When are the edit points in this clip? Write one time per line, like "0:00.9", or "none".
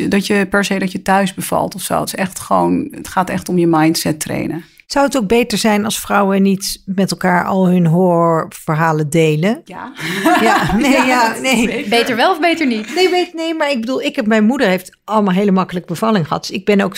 none